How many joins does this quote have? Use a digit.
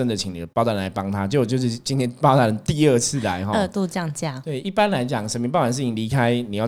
1